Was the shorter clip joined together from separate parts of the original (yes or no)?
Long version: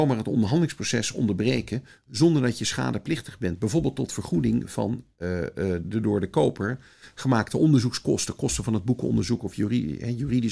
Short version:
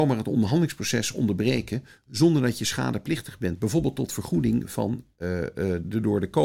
no